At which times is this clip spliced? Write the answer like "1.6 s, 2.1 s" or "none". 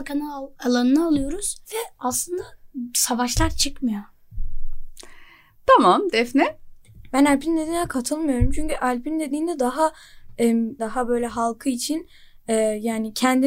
1.6 s, 10.8 s